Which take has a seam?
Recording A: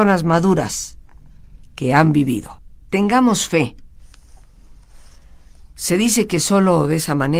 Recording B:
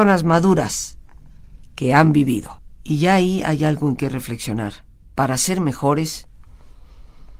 B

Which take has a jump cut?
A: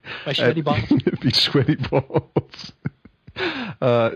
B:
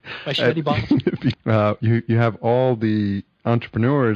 B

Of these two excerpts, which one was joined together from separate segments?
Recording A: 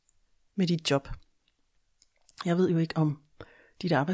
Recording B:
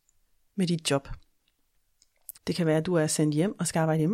B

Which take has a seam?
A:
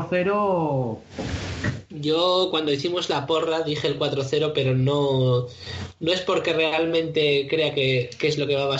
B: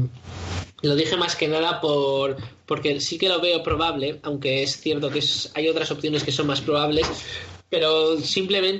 A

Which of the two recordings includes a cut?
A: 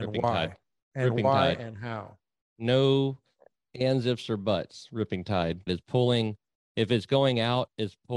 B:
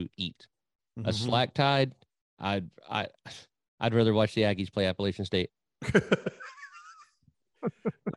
A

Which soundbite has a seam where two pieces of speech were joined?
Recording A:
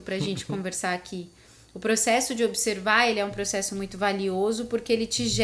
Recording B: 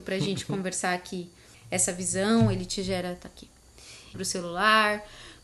B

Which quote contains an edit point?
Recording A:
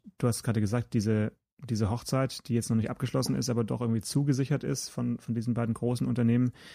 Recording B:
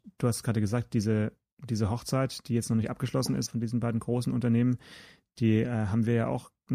B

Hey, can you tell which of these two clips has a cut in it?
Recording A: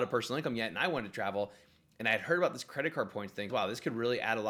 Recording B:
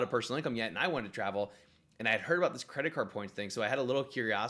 A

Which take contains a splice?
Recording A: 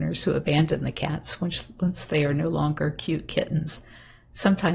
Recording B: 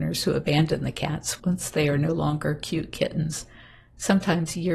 B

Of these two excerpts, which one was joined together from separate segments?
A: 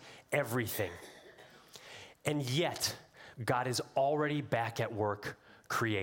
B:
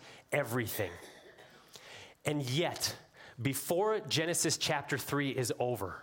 A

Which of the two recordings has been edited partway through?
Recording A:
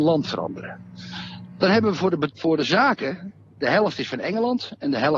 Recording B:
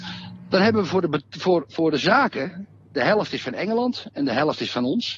A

